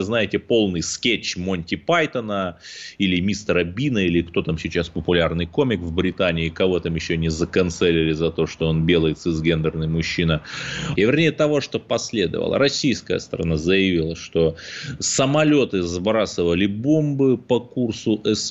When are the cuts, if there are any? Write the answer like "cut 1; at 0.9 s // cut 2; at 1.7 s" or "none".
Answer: cut 1; at 11.0 s